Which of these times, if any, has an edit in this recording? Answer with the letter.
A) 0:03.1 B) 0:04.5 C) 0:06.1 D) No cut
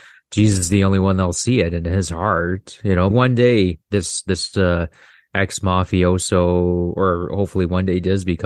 A